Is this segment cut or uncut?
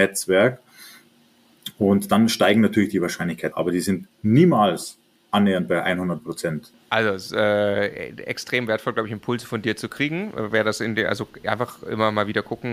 cut